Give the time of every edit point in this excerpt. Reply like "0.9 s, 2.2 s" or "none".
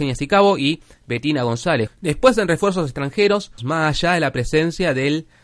1.9 s, 3.6 s